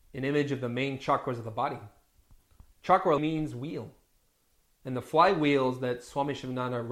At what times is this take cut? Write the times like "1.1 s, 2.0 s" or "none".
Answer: 3.2 s

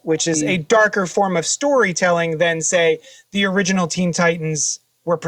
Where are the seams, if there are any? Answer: none

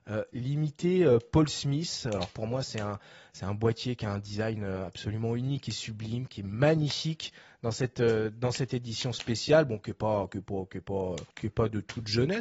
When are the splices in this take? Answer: 11.3 s

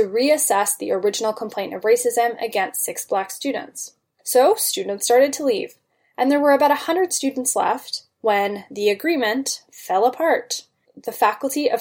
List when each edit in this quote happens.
none

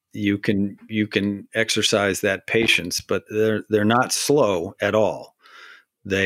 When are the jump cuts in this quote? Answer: 3.3 s

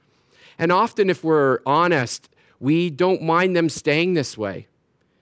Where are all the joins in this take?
none

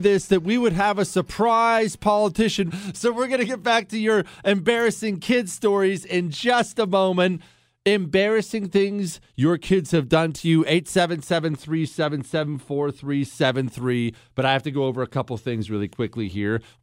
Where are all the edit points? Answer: 2.7 s

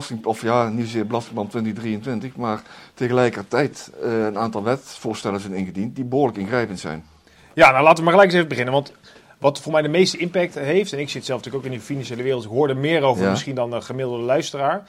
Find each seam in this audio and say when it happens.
none

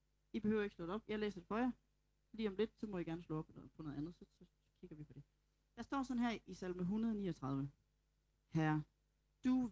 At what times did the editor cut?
4.4 s

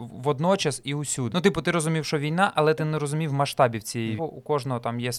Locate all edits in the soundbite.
1.3 s, 4.2 s

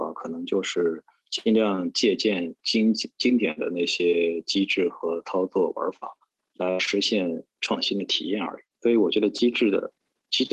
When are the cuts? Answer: none

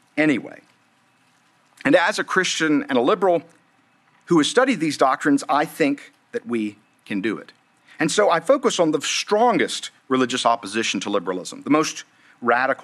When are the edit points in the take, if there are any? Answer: none

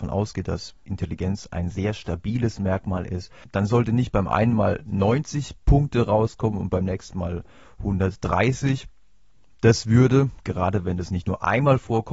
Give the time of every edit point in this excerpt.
1.5 s

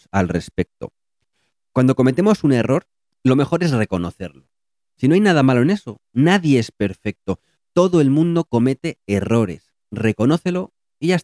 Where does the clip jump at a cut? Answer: none

